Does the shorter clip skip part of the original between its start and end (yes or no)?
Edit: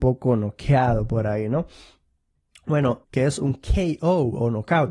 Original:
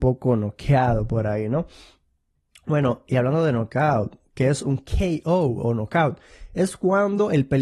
yes